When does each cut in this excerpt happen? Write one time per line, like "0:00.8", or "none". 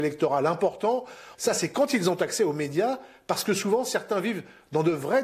0:01.3